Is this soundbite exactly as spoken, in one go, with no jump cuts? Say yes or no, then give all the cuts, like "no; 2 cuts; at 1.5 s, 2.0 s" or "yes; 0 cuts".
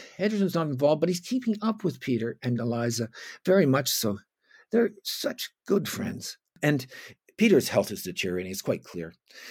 yes; 0 cuts